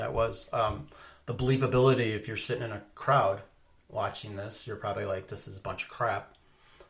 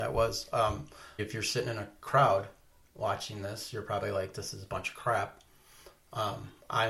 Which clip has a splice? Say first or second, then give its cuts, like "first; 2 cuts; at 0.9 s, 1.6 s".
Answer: second; 1 cut; at 1.2 s